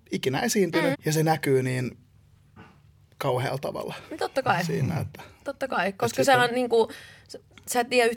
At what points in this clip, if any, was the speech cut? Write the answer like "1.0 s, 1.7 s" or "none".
0.9 s